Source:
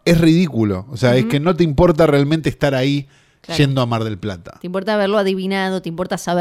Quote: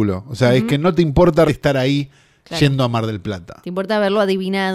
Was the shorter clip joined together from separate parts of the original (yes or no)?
yes